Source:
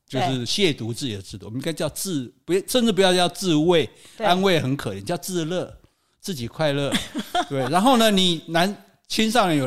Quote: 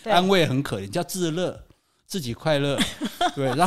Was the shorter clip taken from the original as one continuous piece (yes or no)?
yes